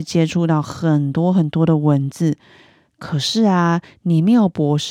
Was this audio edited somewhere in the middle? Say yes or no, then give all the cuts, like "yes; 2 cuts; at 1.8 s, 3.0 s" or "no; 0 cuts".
yes; 1 cut; at 2.8 s